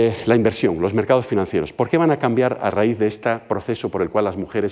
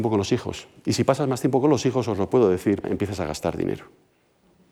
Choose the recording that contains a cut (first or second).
second